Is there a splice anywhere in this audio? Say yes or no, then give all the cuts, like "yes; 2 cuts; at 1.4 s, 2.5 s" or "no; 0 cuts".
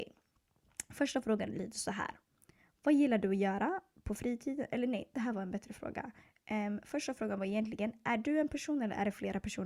no; 0 cuts